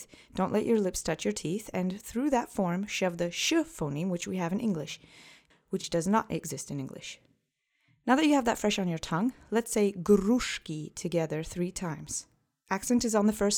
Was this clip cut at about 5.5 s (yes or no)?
yes